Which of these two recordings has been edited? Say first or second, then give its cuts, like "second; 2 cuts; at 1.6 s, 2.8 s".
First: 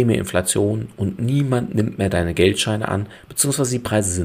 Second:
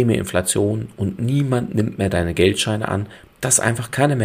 second; 1 cut; at 3.3 s